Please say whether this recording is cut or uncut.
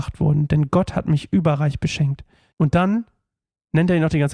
cut